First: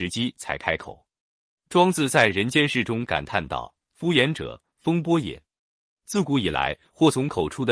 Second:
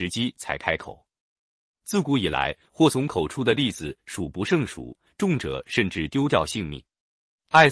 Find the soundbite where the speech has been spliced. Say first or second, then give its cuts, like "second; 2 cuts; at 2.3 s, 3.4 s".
second; 2 cuts; at 1.4 s, 5.1 s